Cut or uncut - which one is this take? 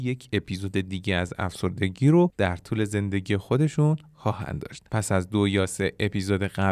cut